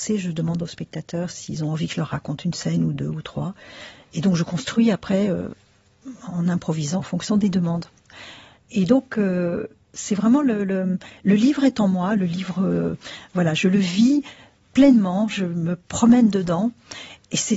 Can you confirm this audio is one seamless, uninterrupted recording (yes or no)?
no